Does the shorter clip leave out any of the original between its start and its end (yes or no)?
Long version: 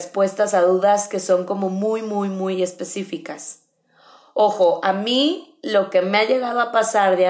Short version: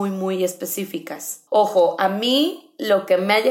yes